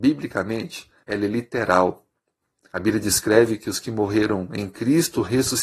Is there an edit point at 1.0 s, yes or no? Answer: yes